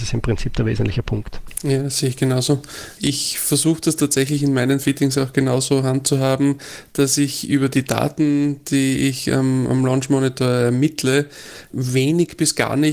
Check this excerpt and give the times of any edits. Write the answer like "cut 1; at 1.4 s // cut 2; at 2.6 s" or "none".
cut 1; at 3.0 s // cut 2; at 11.7 s